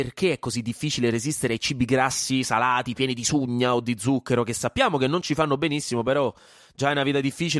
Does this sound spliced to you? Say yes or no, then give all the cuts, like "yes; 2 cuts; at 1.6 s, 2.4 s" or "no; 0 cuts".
no; 0 cuts